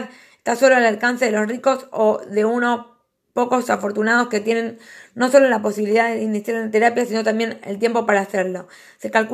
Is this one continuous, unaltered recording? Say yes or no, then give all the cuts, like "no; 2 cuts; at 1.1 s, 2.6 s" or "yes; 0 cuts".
yes; 0 cuts